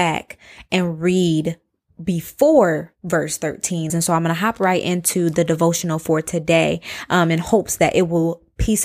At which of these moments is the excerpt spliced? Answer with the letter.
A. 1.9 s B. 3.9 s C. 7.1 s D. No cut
B